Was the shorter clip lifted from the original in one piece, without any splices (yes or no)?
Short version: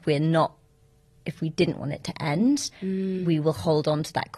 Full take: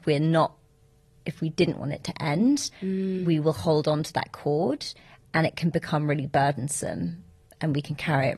yes